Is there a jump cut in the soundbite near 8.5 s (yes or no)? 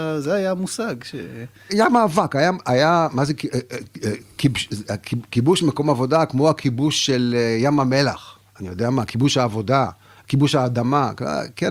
no